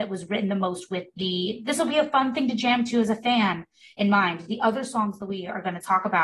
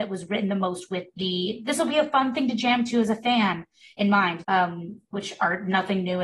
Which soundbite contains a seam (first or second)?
second